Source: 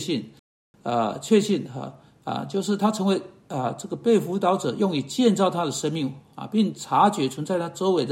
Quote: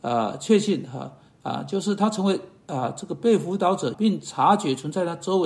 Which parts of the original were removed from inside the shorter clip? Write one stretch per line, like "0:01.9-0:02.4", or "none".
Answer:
0:04.8-0:06.5